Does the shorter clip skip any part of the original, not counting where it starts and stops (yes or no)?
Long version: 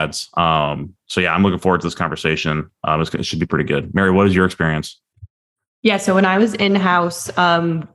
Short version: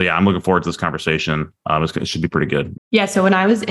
yes